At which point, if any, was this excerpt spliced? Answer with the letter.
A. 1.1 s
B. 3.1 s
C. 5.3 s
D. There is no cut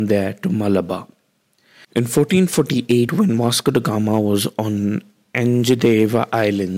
D